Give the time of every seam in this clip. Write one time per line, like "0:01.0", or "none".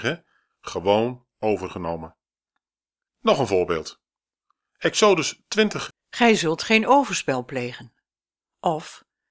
0:03.1
0:05.9

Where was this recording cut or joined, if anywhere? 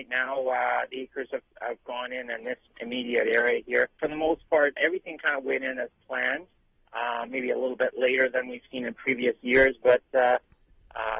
0:04.8

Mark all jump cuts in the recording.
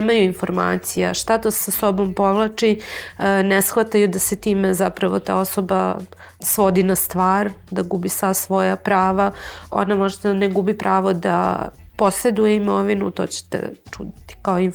none

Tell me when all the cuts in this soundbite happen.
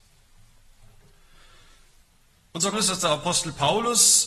0:02.7

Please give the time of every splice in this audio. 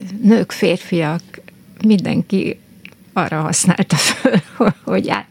none

